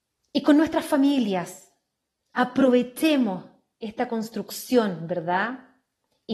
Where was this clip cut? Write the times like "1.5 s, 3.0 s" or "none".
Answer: none

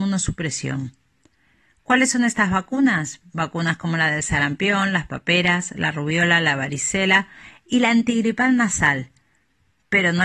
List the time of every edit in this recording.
none

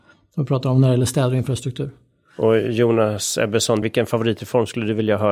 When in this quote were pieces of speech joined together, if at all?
3.8 s

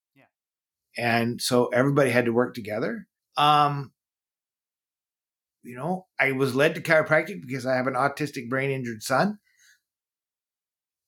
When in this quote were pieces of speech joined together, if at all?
3.2 s, 6.1 s

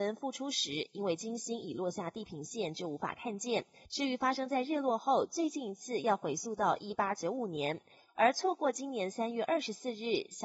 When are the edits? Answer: 3.8 s

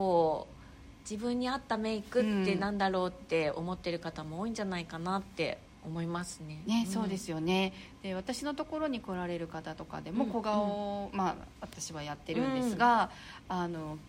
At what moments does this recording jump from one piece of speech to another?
none

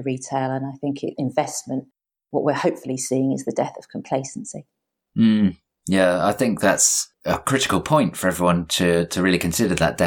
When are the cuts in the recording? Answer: 1.1 s

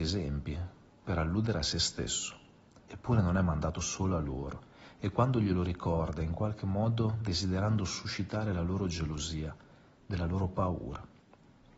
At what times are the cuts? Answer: 2.9 s, 10.0 s

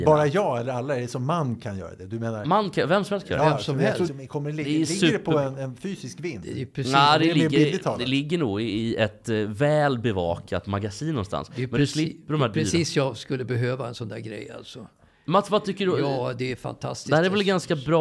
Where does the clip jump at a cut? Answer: 4.1 s

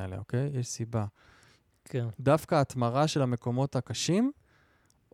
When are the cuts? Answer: 1.7 s

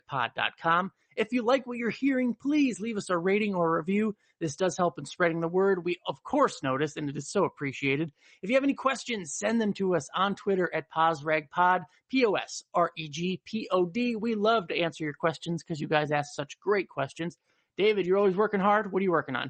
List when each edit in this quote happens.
none

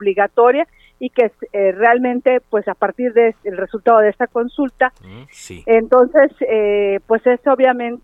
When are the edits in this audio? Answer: 5.2 s

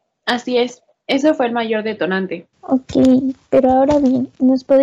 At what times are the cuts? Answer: 2.5 s

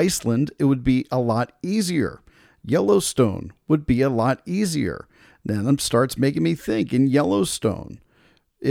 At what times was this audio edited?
none

